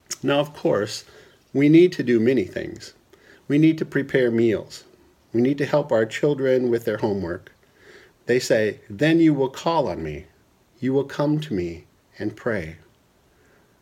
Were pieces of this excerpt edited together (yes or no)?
yes